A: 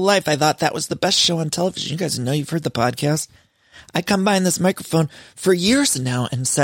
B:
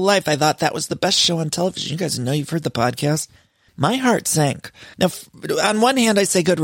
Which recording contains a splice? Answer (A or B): B